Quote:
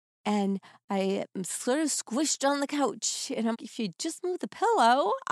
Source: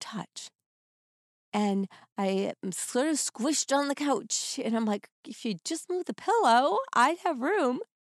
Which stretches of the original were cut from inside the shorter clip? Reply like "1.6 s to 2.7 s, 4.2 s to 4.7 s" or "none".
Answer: 4.8 s to 5.2 s

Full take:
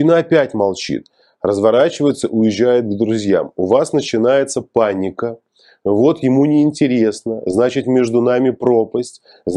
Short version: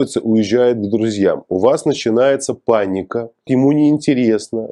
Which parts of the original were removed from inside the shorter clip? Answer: 5.5 s to 6.2 s

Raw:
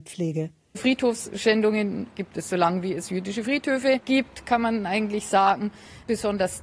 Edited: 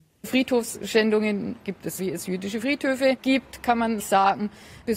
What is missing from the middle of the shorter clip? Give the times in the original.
2.5 s to 2.8 s, 4.8 s to 5.2 s

